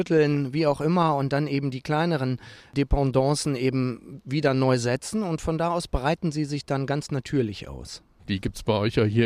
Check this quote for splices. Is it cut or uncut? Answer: cut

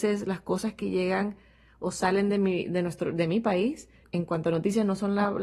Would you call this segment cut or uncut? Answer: cut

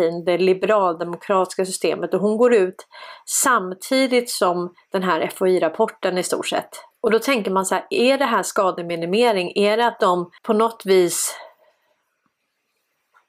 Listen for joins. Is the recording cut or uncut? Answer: cut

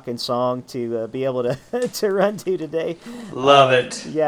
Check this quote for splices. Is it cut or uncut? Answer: uncut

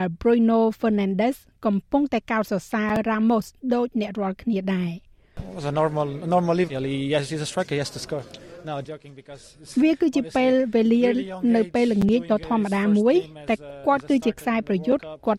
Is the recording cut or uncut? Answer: cut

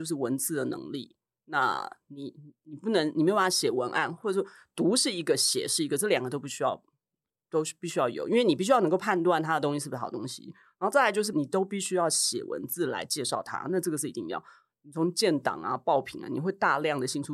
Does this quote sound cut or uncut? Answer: cut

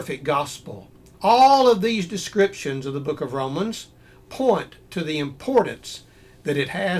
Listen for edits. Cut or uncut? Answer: cut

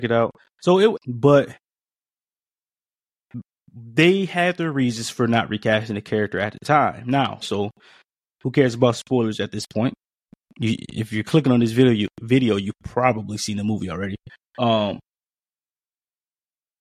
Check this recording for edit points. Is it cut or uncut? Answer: cut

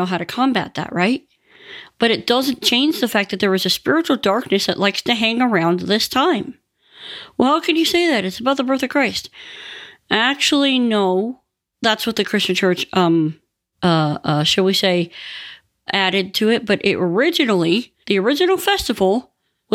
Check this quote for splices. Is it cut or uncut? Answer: cut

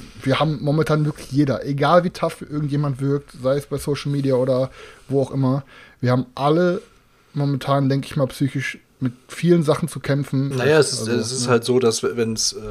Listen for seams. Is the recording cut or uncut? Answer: cut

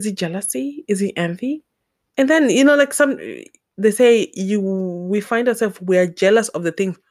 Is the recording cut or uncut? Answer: uncut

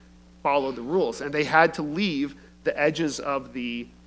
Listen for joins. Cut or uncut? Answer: uncut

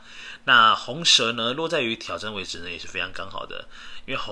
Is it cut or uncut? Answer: uncut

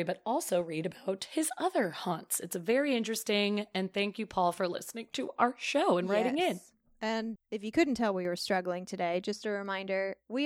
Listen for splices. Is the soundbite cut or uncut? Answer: cut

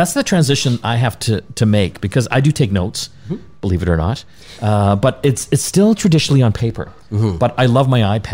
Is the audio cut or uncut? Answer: uncut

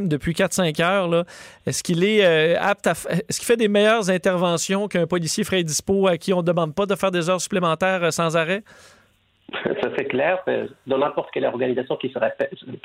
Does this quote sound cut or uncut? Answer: uncut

